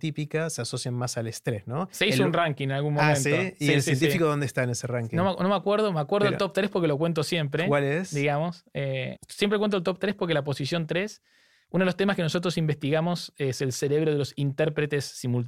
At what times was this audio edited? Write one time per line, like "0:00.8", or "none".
0:09.2